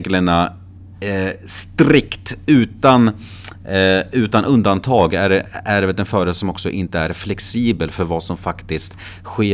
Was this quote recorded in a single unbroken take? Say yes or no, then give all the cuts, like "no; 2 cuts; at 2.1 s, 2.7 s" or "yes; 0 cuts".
yes; 0 cuts